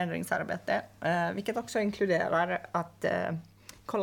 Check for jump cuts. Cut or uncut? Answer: uncut